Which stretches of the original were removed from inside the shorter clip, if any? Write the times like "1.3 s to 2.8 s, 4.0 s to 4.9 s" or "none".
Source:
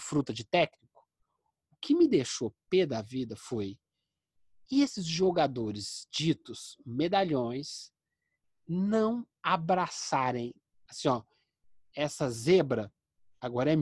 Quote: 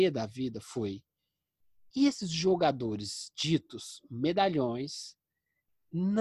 none